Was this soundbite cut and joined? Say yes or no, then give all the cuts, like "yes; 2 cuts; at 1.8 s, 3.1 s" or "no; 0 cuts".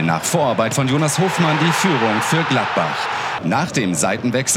yes; 1 cut; at 3.4 s